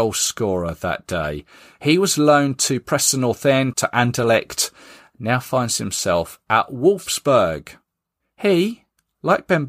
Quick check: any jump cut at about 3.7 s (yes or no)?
yes